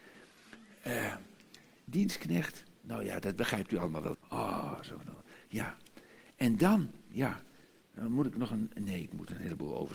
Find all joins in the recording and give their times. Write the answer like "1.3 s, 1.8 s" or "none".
1.8 s, 4.1 s

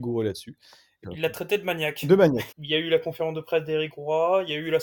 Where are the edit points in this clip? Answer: 1.0 s, 2.5 s

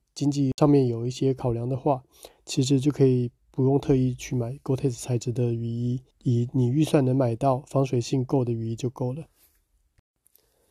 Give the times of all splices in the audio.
6.1 s

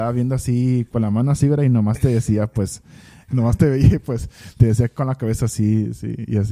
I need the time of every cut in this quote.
3.3 s

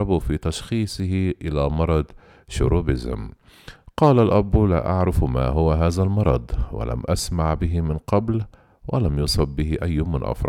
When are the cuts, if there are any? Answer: none

